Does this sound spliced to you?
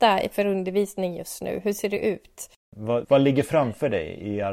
yes; 1 cut; at 3.0 s

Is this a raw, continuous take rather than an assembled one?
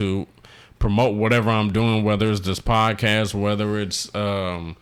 yes; 0 cuts

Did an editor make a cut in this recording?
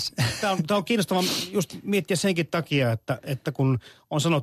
no; 0 cuts

